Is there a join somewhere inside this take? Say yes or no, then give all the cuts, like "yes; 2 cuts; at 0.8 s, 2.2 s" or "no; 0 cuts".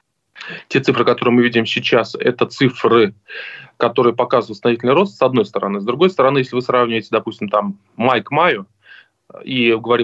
no; 0 cuts